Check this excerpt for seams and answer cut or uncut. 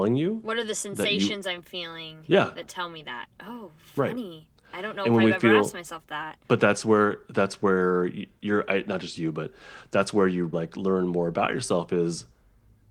cut